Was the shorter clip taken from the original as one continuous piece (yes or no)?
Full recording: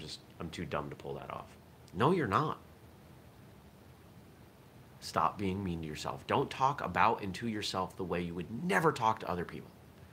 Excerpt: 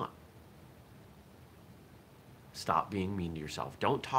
yes